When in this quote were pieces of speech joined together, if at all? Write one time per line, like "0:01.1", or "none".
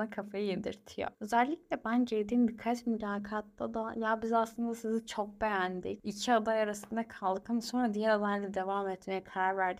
none